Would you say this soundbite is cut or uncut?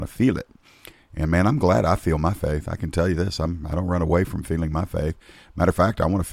uncut